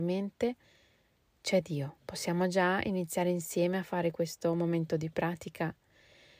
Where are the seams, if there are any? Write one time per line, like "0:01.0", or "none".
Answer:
0:02.0